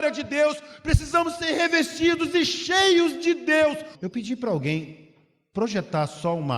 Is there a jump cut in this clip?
yes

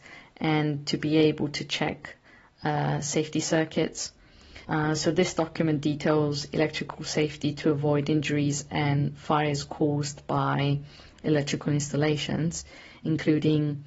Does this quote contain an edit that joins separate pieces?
yes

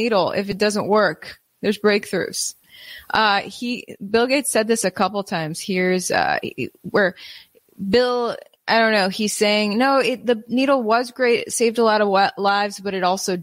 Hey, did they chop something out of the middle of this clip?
no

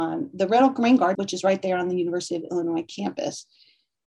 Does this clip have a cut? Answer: yes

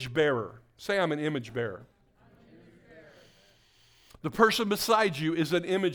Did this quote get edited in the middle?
no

